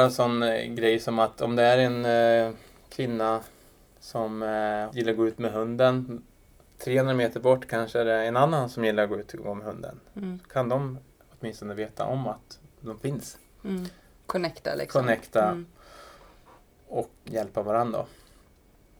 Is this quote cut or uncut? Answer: cut